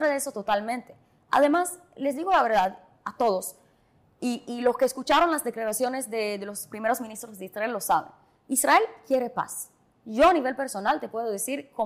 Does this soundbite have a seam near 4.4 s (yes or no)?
no